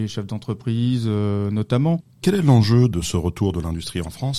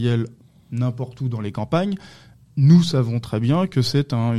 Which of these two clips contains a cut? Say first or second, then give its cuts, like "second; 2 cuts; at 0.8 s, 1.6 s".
first; 1 cut; at 2.2 s